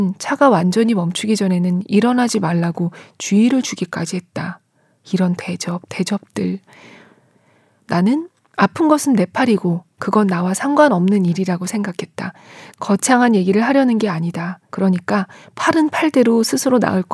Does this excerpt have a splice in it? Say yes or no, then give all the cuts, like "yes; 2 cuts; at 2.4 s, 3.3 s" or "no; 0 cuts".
yes; 2 cuts; at 12.7 s, 14.7 s